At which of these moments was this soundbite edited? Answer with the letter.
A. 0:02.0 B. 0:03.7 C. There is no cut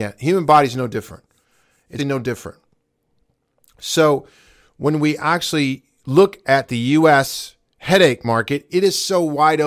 A